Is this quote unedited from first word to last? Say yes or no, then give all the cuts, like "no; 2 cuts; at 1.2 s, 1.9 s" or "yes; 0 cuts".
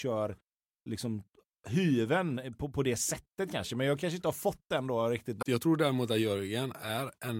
no; 1 cut; at 5.4 s